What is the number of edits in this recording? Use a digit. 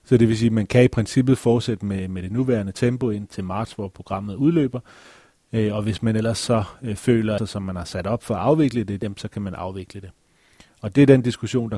3